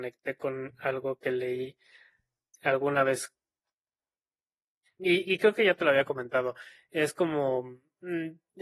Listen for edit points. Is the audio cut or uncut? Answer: uncut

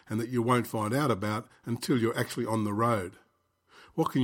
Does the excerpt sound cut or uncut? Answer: uncut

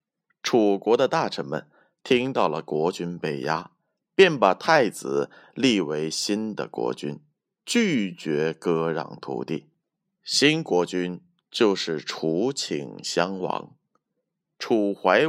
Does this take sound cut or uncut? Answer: uncut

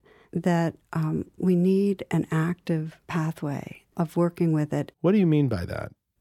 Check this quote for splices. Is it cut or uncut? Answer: cut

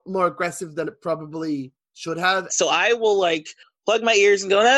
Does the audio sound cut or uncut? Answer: cut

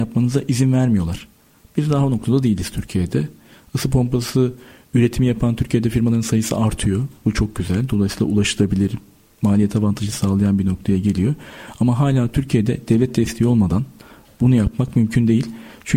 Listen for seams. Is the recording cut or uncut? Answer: uncut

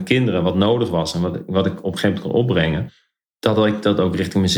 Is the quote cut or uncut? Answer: uncut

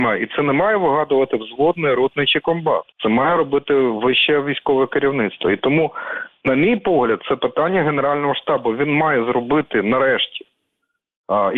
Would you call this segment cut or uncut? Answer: cut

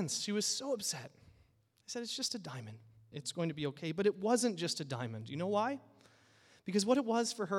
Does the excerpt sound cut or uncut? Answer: cut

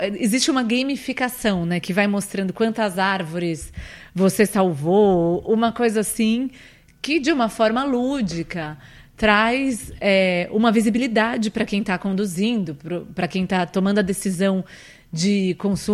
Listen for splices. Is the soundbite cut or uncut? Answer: uncut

